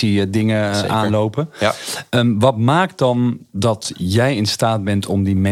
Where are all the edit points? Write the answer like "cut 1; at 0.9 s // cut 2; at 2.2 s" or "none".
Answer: none